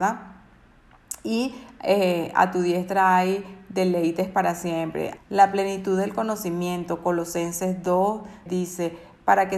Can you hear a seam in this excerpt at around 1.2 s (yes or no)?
no